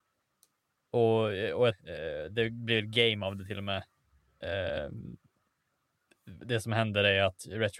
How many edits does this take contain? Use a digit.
1